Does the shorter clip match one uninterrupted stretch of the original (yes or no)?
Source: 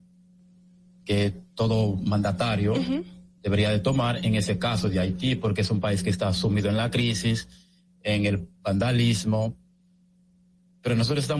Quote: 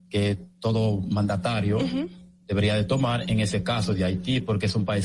yes